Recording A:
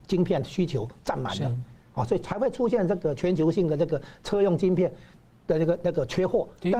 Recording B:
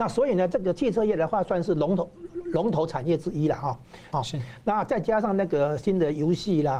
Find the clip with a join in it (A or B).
B